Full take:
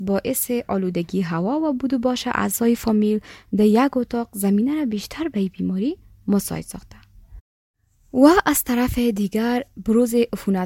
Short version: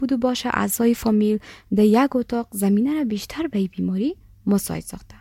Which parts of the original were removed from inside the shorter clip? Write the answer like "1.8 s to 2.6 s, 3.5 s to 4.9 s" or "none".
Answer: none